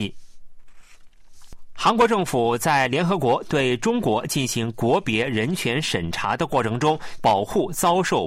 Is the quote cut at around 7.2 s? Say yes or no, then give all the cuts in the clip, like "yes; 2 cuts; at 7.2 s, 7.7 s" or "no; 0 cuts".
yes; 1 cut; at 7.2 s